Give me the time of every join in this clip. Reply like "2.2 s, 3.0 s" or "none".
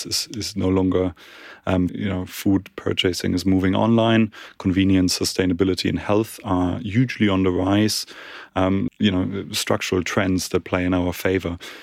1.9 s, 8.9 s